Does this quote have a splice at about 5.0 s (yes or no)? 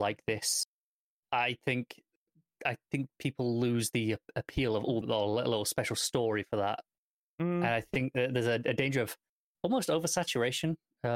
yes